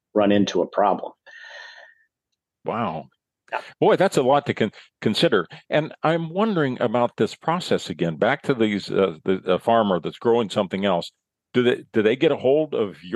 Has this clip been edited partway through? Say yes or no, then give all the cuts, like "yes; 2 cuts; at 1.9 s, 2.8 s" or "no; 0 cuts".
no; 0 cuts